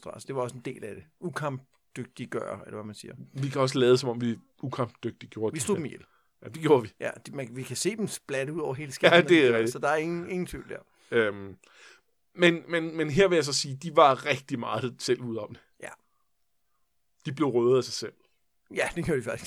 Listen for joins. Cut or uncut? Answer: uncut